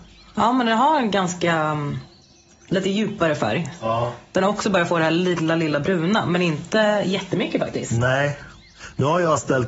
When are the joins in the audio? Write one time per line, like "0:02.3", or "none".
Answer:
none